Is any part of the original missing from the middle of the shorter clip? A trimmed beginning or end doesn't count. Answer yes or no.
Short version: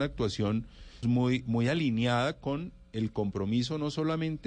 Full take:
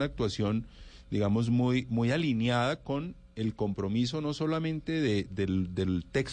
yes